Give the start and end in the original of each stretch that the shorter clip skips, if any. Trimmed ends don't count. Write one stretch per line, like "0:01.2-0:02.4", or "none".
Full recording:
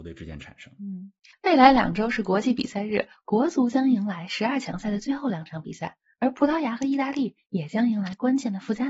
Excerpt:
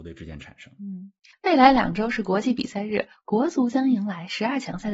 none